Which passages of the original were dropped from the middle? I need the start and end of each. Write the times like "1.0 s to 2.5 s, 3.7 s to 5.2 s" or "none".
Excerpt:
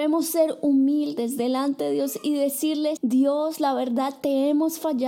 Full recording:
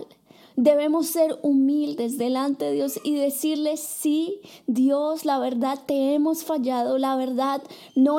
3.8 s to 4.6 s